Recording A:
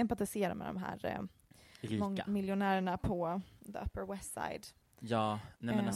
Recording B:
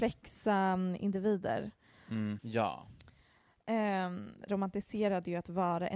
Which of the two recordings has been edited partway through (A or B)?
B